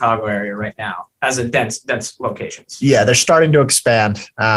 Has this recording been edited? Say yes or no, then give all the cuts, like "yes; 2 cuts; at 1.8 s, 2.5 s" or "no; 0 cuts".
no; 0 cuts